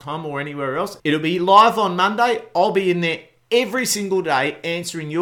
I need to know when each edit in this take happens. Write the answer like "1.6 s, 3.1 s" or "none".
1.0 s

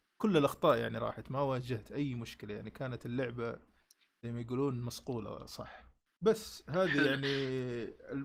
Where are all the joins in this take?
none

